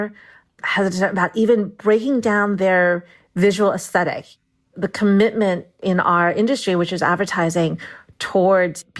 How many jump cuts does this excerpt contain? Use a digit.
0